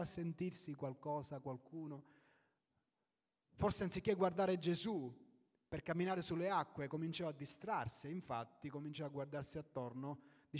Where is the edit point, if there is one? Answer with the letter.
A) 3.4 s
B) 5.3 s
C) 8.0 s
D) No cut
D